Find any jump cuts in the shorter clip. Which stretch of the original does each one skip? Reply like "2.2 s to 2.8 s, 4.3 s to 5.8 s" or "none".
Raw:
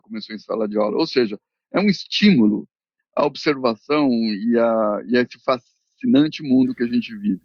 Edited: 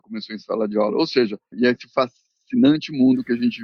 1.5 s to 5.0 s